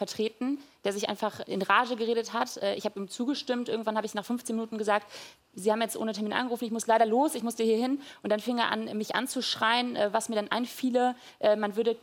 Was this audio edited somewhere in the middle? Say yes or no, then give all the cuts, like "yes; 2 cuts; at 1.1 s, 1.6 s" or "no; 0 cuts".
no; 0 cuts